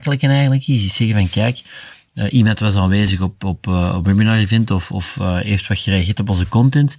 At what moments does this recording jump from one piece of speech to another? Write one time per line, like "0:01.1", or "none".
none